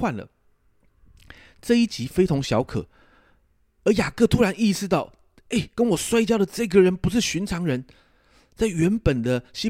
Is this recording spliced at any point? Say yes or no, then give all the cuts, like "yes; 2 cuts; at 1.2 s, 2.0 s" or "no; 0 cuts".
no; 0 cuts